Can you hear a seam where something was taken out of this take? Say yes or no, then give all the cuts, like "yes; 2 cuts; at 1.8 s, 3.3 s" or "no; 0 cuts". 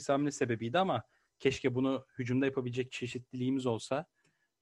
no; 0 cuts